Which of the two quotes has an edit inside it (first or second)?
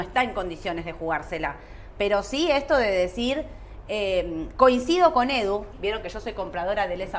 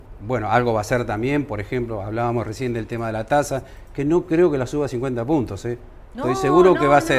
first